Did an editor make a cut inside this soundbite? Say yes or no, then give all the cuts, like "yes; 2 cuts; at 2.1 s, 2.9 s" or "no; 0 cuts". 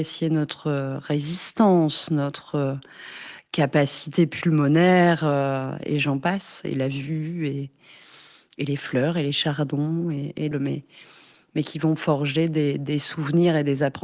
yes; 1 cut; at 10.5 s